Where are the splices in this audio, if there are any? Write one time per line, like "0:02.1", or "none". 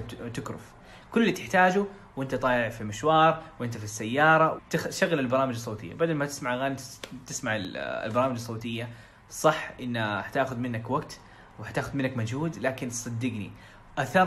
0:04.6